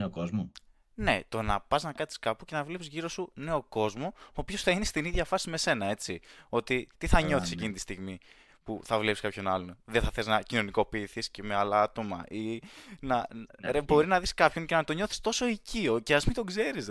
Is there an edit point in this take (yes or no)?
no